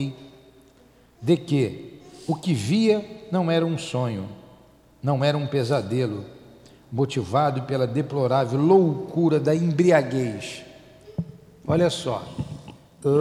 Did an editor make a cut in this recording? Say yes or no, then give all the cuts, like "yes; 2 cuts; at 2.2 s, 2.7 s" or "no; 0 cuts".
yes; 1 cut; at 11.6 s